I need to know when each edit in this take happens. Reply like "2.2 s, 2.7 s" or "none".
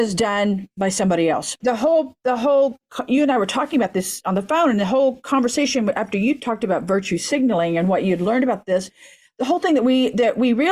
1.6 s